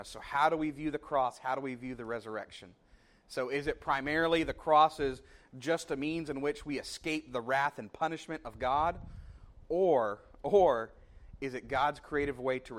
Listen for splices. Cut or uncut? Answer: uncut